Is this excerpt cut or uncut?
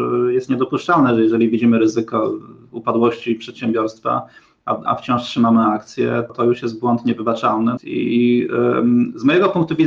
cut